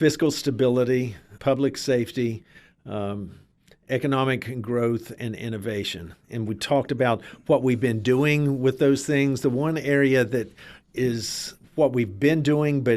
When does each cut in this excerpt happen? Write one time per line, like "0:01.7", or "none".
0:01.4